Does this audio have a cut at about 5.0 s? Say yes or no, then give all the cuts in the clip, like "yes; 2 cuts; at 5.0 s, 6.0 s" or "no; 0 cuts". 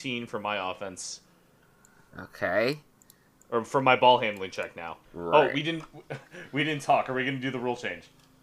yes; 1 cut; at 5.0 s